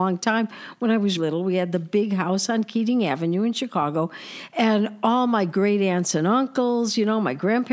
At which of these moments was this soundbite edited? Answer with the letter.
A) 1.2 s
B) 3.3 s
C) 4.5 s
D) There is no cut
A